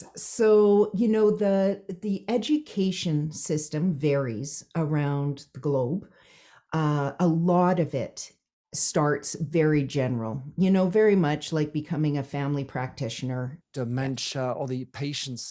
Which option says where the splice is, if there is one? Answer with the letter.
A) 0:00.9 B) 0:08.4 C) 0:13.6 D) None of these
C